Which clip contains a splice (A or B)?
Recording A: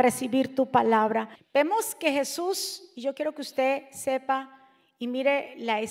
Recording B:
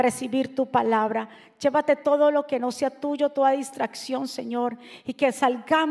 A